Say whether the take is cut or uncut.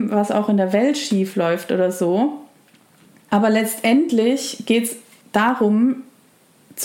uncut